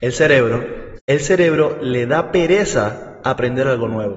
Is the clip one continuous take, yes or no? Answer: no